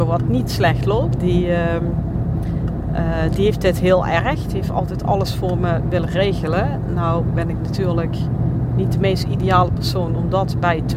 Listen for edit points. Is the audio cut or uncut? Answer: cut